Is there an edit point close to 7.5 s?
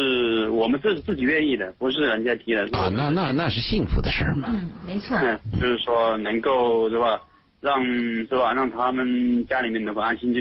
no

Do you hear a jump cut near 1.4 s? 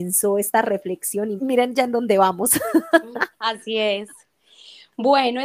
yes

